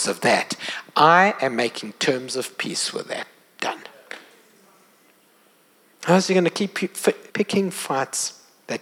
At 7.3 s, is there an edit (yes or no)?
yes